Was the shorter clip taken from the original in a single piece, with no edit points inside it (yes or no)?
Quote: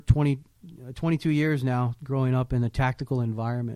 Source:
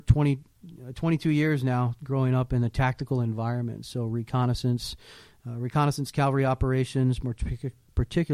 yes